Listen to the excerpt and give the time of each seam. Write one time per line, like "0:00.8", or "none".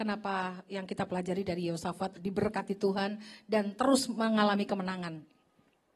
0:02.2